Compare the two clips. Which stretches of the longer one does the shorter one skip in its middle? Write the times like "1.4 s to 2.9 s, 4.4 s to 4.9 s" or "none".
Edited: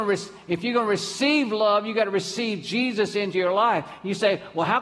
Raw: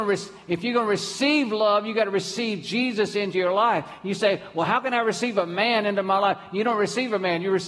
none